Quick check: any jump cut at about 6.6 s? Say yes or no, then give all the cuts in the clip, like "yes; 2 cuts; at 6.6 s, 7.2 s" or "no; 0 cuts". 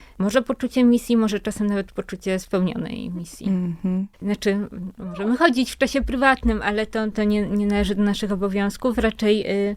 no; 1 cut; at 4.1 s